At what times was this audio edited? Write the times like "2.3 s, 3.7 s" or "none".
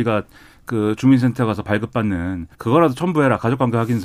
2.5 s